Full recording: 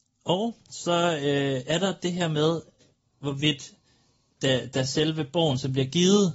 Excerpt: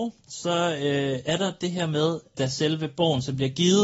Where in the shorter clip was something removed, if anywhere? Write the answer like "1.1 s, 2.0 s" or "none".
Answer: 2.3 s